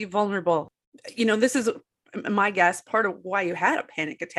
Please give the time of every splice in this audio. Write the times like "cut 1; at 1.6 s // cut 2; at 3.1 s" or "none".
none